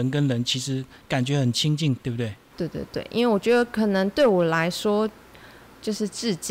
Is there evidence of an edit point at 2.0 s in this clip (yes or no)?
yes